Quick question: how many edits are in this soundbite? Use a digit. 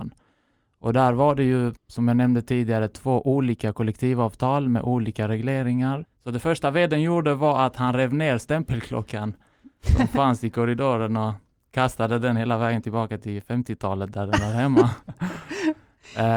1